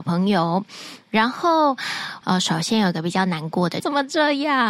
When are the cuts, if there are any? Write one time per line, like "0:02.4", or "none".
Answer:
0:02.2
0:03.8